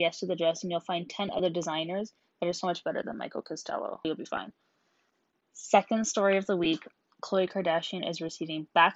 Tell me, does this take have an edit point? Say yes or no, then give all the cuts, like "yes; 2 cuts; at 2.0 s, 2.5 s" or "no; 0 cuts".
yes; 1 cut; at 4.0 s